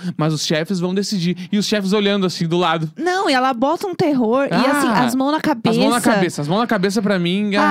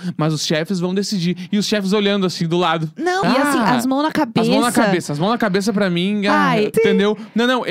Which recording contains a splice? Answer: second; 2 cuts; at 3.2 s, 6.7 s

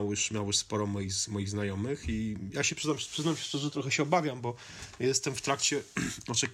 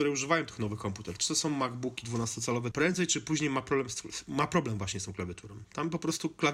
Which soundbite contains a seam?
second; 1 cut; at 2.7 s

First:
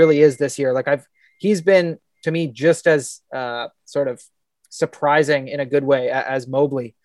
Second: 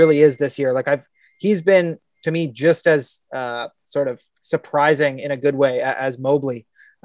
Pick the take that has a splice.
second; 1 cut; at 4.3 s

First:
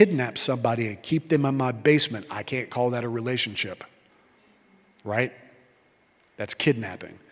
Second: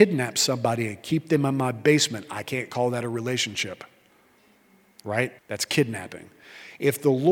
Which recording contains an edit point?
second; 1 cut; at 5.4 s

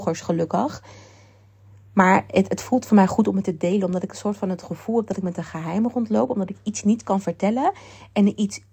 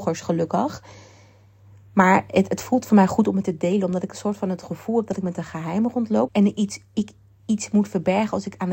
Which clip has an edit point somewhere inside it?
second; 1 cut; at 6.3 s

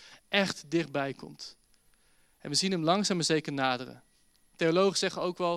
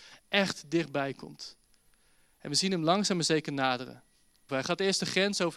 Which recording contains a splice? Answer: second; 1 cut; at 4.5 s

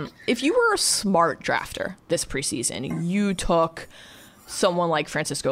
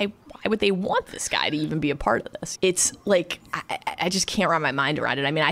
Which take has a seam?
second; 1 cut; at 2.6 s

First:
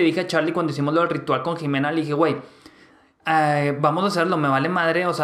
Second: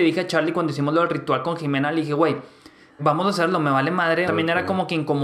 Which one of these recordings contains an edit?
second; 2 cuts; at 3.0 s, 4.3 s

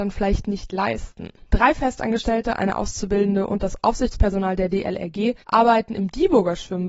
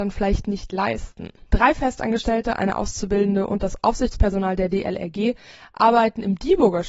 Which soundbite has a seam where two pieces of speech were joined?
first; 1 cut; at 5.4 s

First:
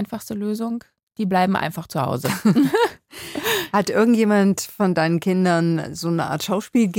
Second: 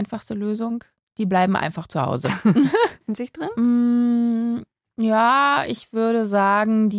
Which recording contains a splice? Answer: second; 1 cut; at 3.0 s

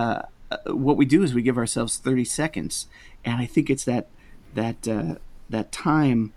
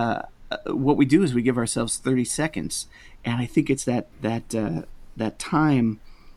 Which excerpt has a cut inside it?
second; 1 cut; at 4.1 s

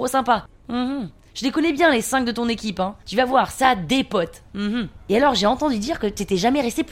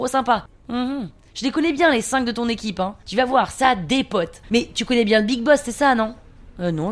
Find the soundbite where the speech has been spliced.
second; 1 cut; at 4.4 s

